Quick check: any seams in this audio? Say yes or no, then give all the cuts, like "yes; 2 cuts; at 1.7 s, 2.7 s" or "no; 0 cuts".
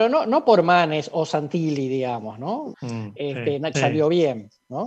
yes; 2 cuts; at 2.7 s, 3.7 s